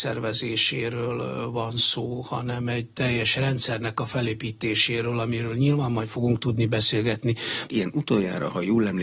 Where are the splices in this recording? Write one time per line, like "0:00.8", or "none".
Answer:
0:07.7